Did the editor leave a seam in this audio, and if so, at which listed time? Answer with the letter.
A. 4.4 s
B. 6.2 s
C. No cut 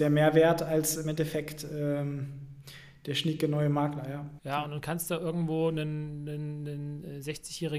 A